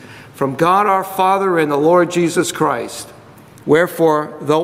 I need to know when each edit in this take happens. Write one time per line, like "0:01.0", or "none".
0:03.5

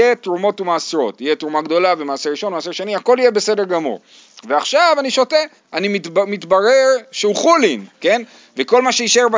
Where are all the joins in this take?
0:05.6
0:07.9

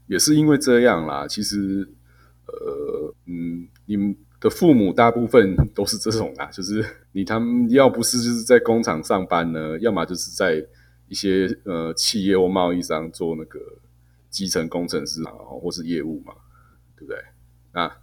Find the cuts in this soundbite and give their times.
0:03.1
0:07.0
0:15.3

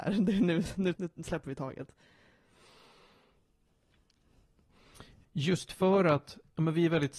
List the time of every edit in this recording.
0:00.9
0:05.2

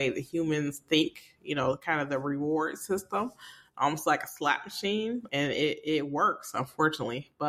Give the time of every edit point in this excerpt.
none

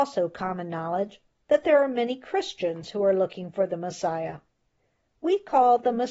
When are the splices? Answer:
none

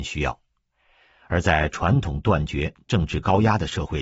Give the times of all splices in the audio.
none

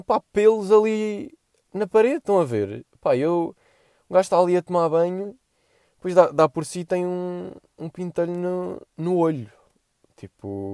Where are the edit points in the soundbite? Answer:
0:08.9

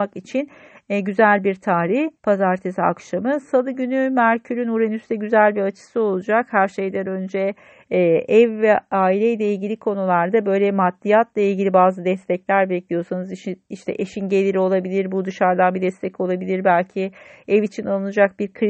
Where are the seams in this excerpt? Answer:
0:02.2

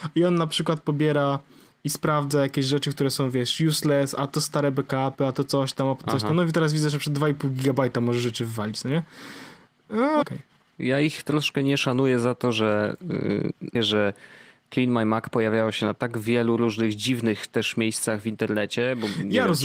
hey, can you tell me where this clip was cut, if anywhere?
0:10.2
0:13.7

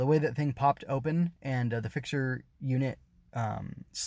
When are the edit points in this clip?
none

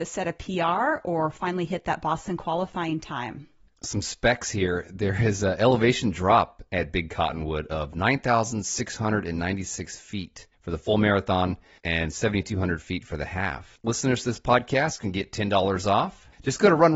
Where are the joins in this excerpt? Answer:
none

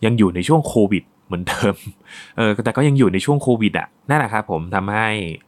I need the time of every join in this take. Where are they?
0:04.0

